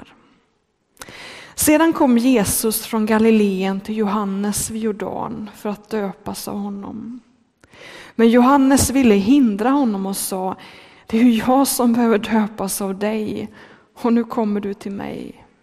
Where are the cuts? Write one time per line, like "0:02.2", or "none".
none